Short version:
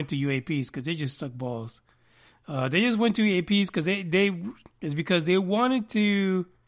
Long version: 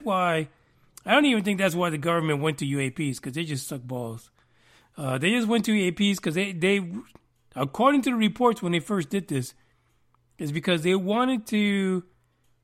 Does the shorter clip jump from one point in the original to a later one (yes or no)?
yes